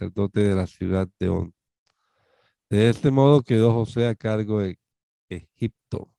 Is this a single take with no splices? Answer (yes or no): yes